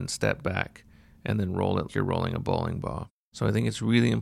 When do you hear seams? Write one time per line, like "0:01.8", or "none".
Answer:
0:01.9

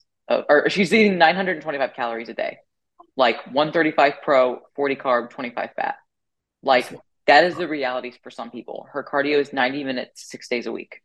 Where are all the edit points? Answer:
none

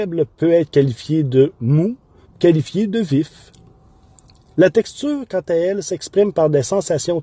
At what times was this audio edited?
0:02.3

